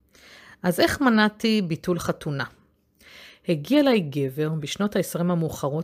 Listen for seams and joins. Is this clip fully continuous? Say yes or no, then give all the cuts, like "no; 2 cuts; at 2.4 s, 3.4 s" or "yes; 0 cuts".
yes; 0 cuts